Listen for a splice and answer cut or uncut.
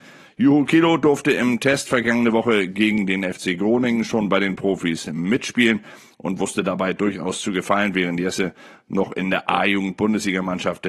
uncut